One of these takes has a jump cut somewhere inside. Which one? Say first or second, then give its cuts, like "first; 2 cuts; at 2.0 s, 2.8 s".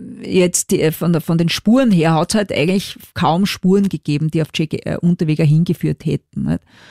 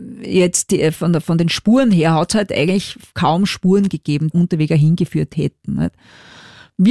second; 1 cut; at 4.3 s